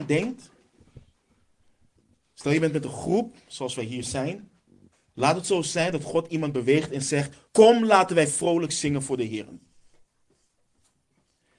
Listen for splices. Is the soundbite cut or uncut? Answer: cut